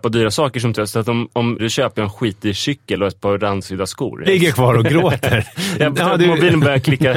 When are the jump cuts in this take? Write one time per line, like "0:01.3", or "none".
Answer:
0:01.6
0:04.3